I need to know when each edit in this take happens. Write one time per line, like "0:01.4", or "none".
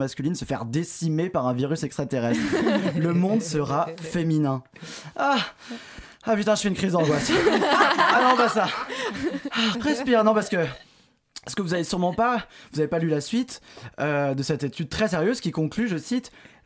0:09.7